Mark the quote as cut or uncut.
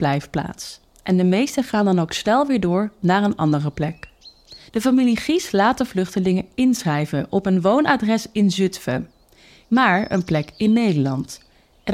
cut